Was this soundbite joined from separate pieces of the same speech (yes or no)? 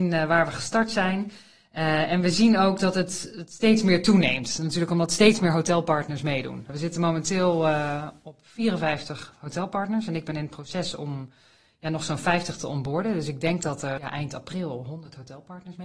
no